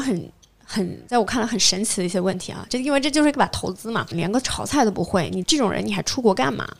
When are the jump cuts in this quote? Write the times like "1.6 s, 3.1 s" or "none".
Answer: 2.7 s, 4.1 s, 5.4 s